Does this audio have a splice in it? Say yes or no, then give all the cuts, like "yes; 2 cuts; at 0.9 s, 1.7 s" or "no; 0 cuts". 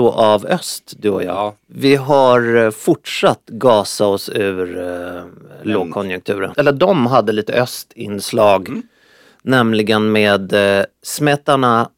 yes; 1 cut; at 6.5 s